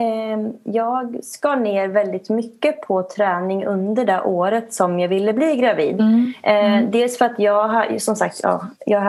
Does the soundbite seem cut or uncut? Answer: uncut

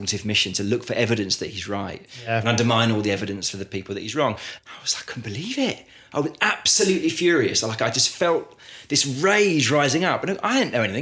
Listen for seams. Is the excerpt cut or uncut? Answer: cut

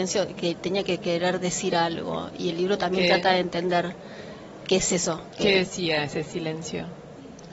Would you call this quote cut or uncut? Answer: uncut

